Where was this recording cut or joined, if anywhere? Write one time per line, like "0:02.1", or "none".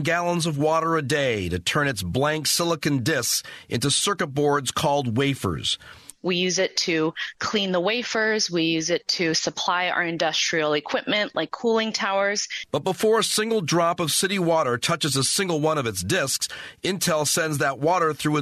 0:06.2